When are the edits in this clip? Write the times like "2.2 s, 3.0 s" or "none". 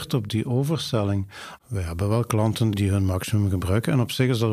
1.6 s, 2.7 s